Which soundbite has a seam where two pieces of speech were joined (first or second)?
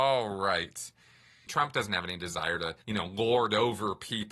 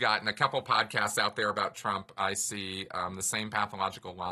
first